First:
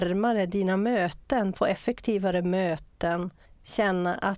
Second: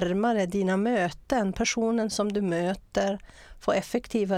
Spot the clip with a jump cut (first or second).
first